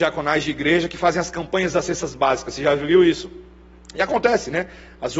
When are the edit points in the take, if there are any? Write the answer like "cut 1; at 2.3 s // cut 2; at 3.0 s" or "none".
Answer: none